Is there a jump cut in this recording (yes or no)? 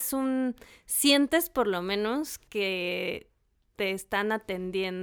no